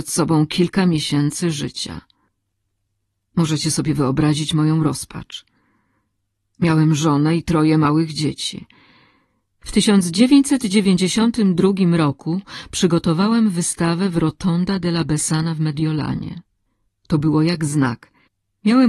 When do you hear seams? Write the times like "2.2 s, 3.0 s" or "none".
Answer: 9.5 s, 16.9 s